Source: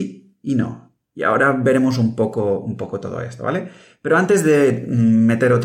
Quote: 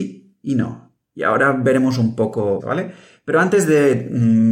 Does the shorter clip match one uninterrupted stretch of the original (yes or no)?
no